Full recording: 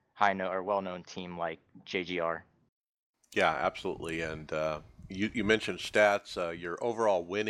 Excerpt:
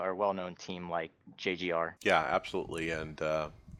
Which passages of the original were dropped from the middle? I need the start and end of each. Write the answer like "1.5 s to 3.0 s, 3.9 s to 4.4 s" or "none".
2.4 s to 3.3 s